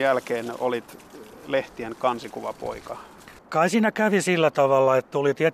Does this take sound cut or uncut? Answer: cut